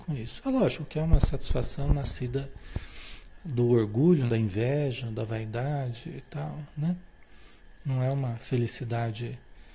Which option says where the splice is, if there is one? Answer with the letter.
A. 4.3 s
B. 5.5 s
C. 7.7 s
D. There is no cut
A